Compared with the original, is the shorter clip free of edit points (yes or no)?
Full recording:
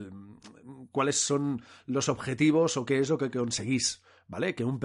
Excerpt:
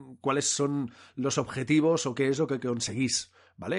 yes